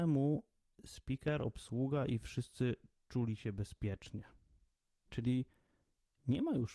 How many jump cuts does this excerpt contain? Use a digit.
1